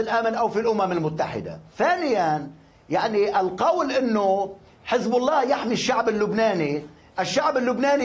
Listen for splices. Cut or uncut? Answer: cut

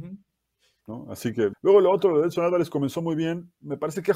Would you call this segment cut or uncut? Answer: cut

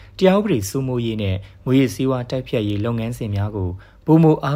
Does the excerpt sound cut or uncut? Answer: uncut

